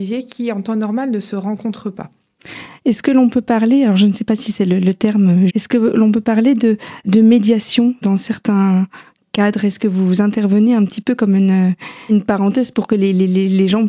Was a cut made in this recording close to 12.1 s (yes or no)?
yes